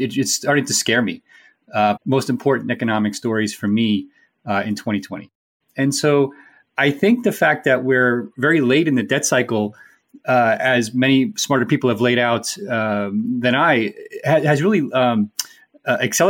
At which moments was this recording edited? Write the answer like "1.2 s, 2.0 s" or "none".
2.0 s, 5.6 s